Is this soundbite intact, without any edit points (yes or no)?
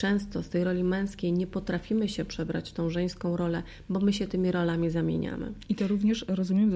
yes